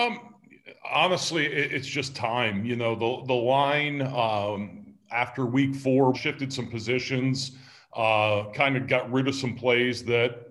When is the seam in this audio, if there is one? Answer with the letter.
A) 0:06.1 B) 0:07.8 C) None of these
A